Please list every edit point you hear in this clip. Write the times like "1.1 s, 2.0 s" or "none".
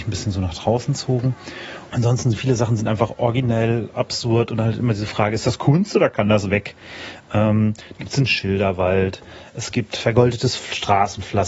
1.9 s